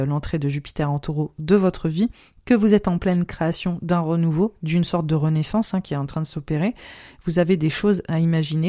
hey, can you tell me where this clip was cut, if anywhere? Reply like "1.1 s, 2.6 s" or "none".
none